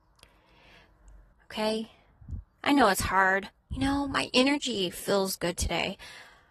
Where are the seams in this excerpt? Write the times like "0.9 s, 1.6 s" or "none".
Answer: 1.3 s, 3.5 s